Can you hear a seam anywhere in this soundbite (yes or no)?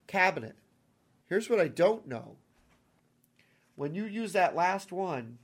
no